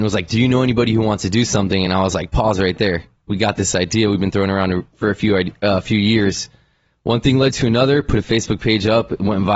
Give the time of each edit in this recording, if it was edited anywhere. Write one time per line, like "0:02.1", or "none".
none